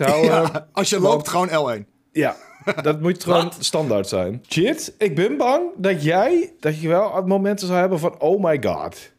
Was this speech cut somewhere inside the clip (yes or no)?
yes